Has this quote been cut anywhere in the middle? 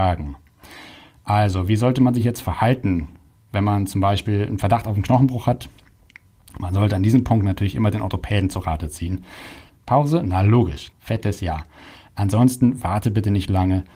yes; 2 cuts; at 9.7 s, 10.9 s

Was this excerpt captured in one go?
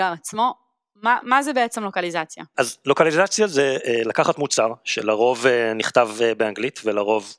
no; 1 cut; at 2.5 s

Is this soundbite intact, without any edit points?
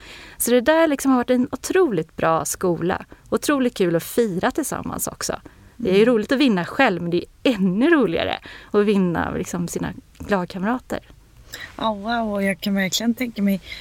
yes; 0 cuts

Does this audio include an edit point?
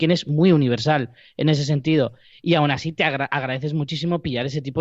no; 0 cuts

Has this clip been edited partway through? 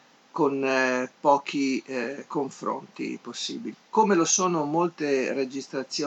yes; 1 cut; at 3.7 s

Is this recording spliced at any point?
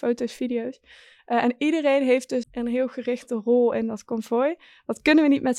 yes; 1 cut; at 2.4 s

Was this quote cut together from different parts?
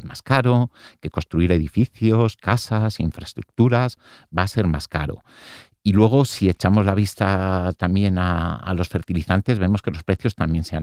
no; 0 cuts

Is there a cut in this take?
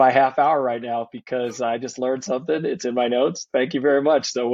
no; 0 cuts

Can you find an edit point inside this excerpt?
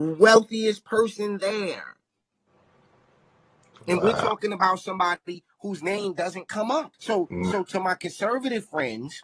yes; 1 cut; at 6.9 s

